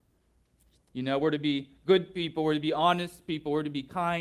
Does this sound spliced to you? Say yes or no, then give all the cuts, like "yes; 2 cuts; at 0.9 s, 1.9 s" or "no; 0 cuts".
no; 0 cuts